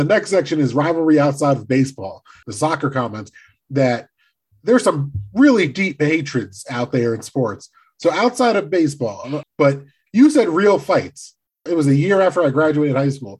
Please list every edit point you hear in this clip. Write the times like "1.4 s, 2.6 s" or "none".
2.4 s, 9.4 s, 11.7 s